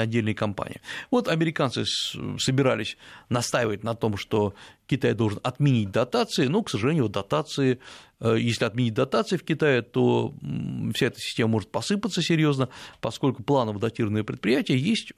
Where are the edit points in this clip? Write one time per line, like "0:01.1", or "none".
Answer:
none